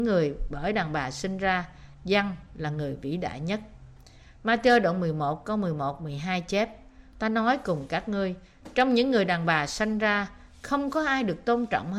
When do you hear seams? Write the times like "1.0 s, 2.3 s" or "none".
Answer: 7.1 s